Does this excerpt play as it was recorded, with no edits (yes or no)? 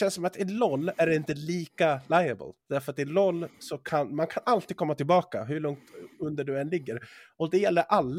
yes